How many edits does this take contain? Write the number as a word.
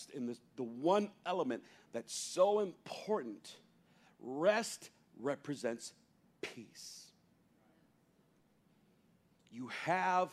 zero